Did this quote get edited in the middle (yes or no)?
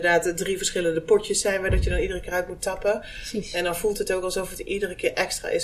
no